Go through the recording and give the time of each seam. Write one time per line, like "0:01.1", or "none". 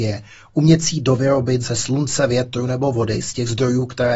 none